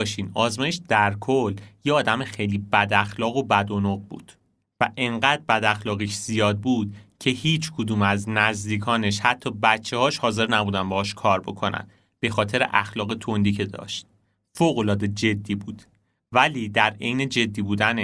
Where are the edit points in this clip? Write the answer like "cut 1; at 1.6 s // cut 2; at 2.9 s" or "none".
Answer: none